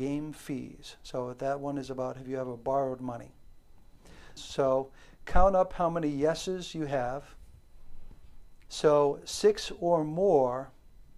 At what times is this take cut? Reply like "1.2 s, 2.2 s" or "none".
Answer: 4.4 s, 8.7 s